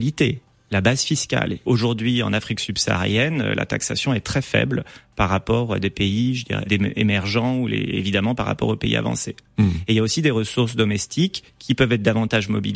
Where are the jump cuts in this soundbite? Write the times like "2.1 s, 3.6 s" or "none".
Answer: 1.7 s, 6.7 s